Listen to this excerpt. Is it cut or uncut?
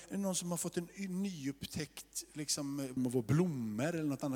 cut